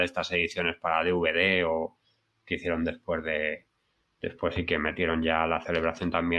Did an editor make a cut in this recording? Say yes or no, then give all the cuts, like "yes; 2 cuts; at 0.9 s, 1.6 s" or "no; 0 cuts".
no; 0 cuts